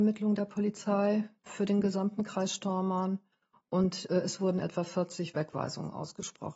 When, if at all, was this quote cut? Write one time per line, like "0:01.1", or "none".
none